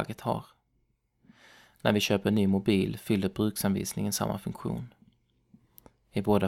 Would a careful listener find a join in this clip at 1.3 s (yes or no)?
no